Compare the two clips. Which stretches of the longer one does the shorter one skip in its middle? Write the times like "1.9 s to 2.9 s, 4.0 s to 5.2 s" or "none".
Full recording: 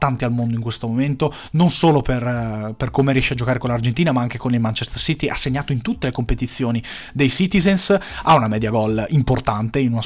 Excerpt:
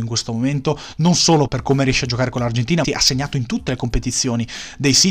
2.0 s to 2.8 s, 4.1 s to 5.2 s